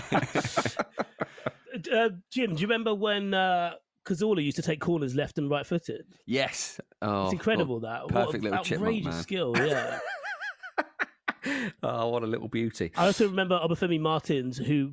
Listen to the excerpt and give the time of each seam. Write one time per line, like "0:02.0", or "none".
none